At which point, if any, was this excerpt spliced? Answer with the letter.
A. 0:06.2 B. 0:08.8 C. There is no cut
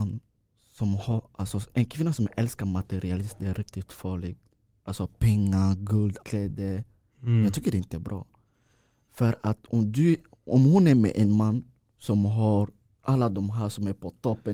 A